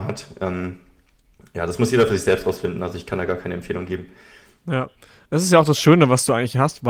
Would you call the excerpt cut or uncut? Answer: uncut